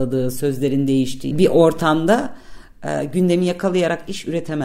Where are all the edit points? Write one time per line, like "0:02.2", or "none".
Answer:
0:01.3